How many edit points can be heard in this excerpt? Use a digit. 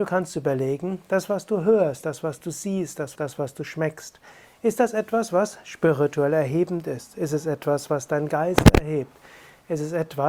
1